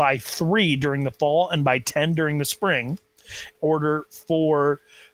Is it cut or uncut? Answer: cut